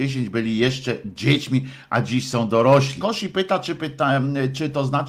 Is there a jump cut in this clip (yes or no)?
yes